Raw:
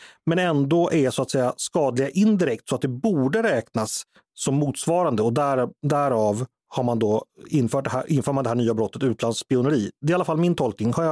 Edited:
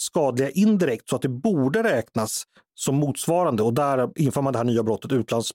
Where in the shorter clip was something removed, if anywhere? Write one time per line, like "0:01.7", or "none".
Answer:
0:04.2